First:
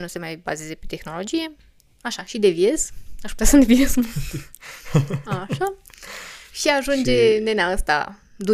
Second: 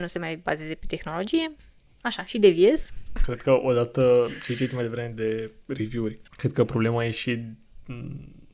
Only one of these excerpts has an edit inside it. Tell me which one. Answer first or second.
second